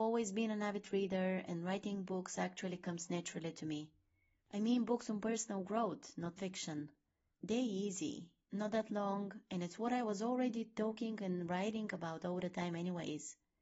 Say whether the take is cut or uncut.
uncut